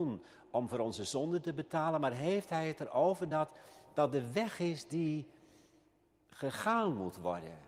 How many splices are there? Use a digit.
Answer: 0